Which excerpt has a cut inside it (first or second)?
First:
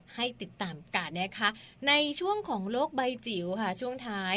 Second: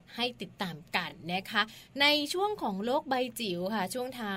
first